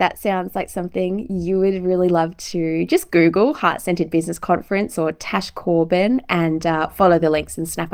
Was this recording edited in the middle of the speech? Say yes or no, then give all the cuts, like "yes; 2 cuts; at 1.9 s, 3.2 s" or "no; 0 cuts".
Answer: no; 0 cuts